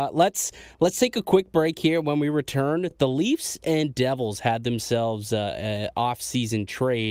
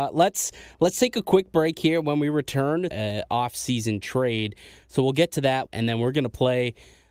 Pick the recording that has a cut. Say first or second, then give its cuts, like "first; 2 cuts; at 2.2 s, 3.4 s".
second; 2 cuts; at 2.9 s, 5.7 s